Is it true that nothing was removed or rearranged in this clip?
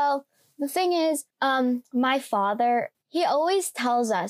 no; 2 cuts; at 1.3 s, 2.9 s

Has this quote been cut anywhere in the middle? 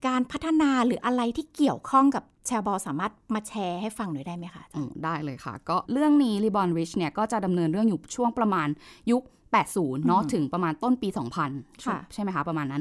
yes; 1 cut; at 5.8 s

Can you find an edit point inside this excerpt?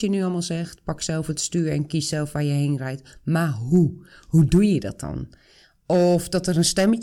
no; 0 cuts

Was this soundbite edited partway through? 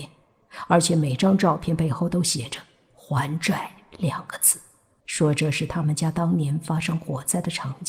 yes; 1 cut; at 5.0 s

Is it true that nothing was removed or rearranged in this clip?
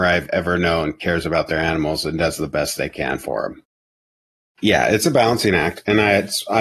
yes; 0 cuts

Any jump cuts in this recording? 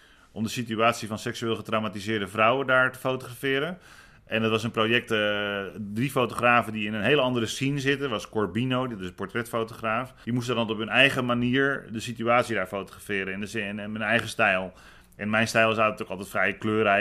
yes; 1 cut; at 10.2 s

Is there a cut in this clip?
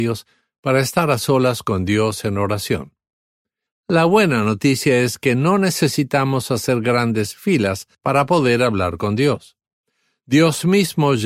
yes; 2 cuts; at 3.7 s, 7.9 s

